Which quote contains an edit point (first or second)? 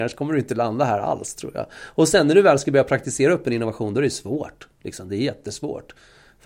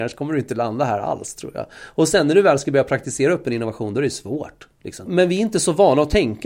second